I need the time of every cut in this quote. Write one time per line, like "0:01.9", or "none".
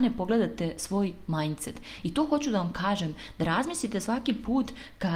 0:02.0